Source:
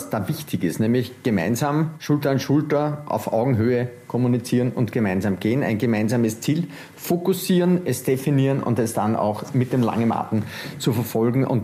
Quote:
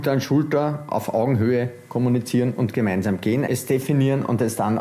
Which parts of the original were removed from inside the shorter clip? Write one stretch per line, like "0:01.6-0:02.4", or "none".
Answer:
0:05.6-0:07.8